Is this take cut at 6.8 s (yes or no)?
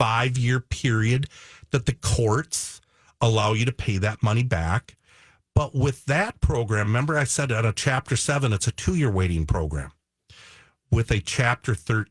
no